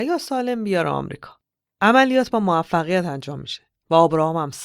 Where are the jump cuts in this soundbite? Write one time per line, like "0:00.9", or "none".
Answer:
none